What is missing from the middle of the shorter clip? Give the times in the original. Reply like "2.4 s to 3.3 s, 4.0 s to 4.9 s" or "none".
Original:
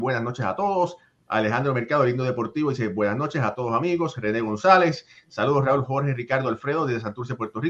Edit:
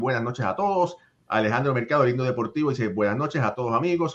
none